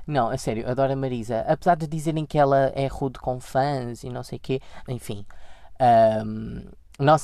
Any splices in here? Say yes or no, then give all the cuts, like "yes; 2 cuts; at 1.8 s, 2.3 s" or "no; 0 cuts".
yes; 1 cut; at 4.8 s